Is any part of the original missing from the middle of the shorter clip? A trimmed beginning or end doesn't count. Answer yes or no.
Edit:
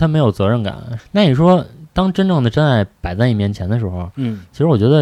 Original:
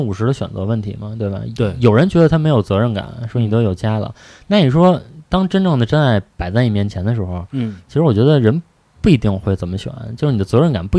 yes